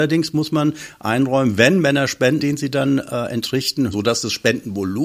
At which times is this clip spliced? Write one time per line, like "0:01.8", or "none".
0:02.4
0:03.9